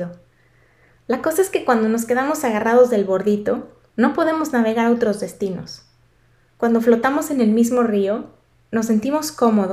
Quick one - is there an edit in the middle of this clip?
no; 0 cuts

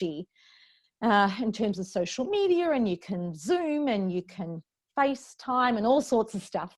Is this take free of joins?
yes; 0 cuts

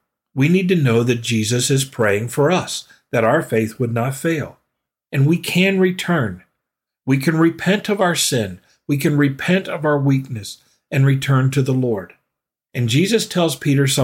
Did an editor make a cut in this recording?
no; 0 cuts

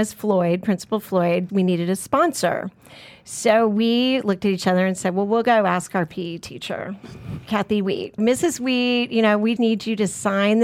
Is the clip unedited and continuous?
no; 3 cuts; at 1.5 s, 8.2 s, 9.6 s

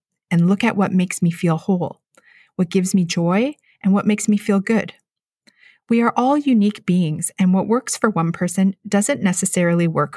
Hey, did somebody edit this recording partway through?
no; 0 cuts

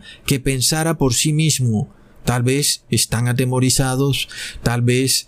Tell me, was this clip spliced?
no; 0 cuts

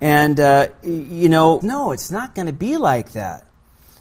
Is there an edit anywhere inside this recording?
yes; 1 cut; at 1.6 s

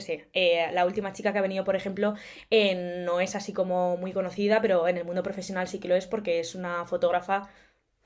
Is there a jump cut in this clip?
no; 0 cuts

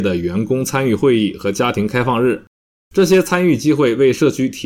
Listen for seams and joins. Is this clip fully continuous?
yes; 0 cuts

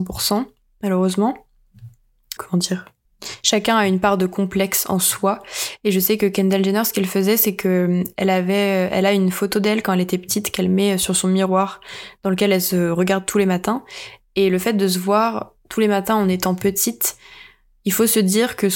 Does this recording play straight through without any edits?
no; 1 cut; at 2.4 s

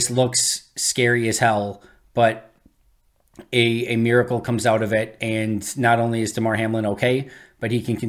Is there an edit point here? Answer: no; 0 cuts

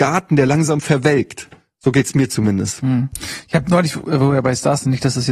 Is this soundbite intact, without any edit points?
yes; 0 cuts

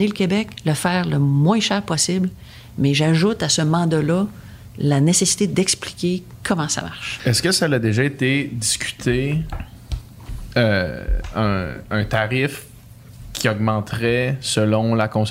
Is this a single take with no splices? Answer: no; 1 cut; at 7.2 s

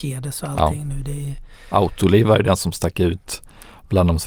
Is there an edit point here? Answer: no; 0 cuts

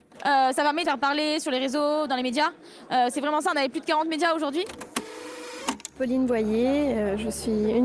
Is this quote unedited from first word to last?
yes; 0 cuts

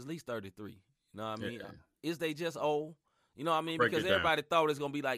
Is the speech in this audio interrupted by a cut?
no; 0 cuts

